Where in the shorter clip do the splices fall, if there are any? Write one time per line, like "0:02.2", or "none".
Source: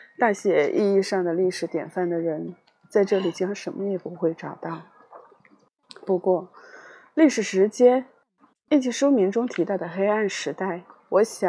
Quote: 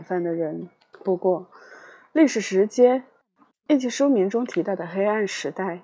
0:00.9